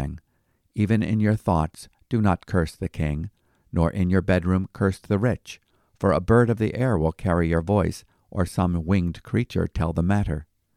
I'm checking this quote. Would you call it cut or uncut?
uncut